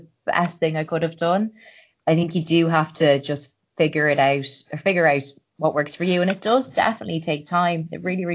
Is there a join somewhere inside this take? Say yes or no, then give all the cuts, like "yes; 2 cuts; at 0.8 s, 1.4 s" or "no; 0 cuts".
no; 0 cuts